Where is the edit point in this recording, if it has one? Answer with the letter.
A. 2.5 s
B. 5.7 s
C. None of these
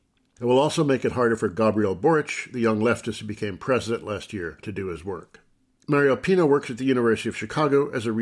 C